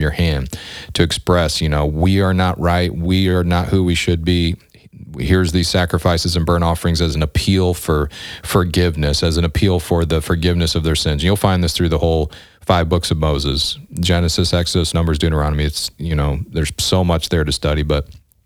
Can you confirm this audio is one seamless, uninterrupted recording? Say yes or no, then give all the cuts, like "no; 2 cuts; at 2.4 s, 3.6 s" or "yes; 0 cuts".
no; 1 cut; at 14.9 s